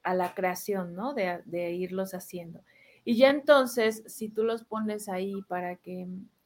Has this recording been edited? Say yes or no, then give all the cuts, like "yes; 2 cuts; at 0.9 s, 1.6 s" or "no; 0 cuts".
no; 0 cuts